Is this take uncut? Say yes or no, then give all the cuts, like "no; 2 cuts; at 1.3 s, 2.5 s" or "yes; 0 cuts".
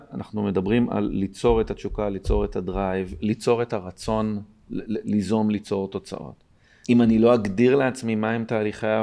no; 1 cut; at 6.8 s